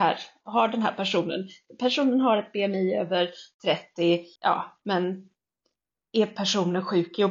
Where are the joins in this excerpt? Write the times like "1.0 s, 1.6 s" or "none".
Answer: 4.4 s